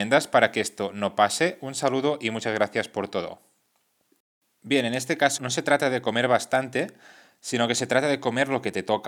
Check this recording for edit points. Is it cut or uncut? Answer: cut